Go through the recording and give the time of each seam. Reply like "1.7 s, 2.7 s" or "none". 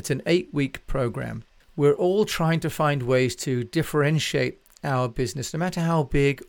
1.6 s